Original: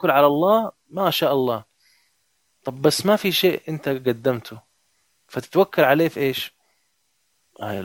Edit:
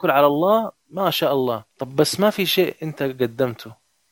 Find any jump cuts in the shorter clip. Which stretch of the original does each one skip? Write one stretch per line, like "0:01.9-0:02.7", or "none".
0:01.7-0:02.6